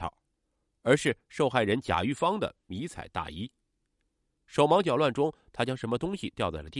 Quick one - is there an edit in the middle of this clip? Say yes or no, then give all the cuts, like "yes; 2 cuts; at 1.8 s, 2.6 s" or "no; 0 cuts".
yes; 1 cut; at 4.3 s